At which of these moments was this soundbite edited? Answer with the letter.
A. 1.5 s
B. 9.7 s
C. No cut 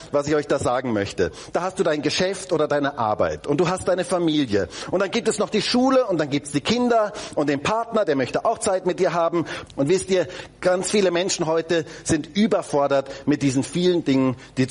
B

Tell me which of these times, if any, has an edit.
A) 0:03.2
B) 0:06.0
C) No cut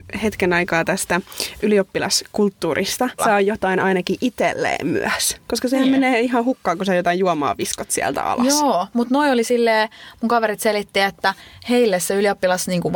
A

